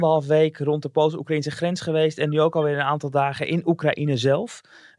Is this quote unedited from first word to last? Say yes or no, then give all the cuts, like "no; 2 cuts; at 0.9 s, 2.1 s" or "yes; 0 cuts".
yes; 0 cuts